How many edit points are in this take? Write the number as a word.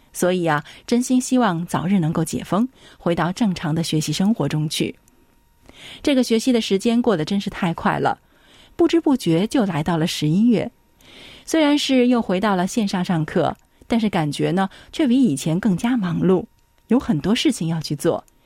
zero